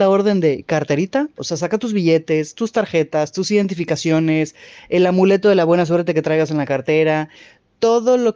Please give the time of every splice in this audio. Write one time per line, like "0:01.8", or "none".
0:01.4